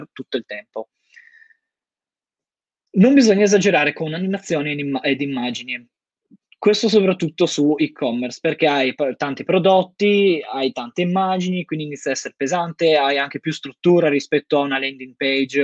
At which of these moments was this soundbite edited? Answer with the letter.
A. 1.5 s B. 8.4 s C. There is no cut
C